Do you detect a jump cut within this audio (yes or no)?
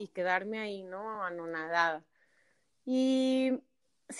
no